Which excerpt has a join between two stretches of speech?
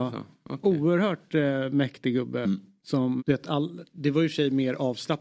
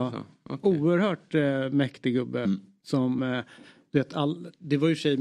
first; 1 cut; at 3.2 s

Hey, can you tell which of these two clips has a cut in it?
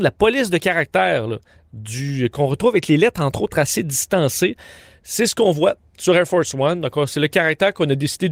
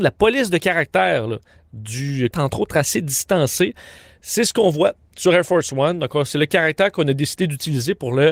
second; 1 cut; at 2.3 s

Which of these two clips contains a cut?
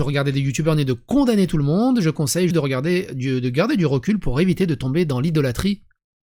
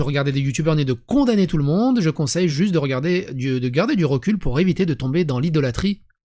first; 1 cut; at 2.5 s

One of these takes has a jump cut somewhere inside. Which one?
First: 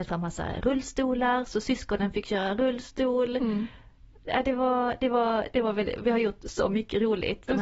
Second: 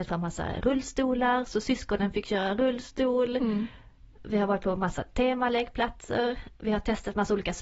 second; 1 cut; at 4.2 s

